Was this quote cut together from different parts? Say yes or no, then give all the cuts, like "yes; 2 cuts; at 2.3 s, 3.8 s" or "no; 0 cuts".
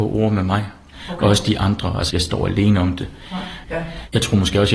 yes; 2 cuts; at 2.1 s, 3.6 s